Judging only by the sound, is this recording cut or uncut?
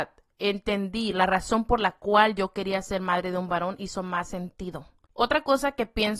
cut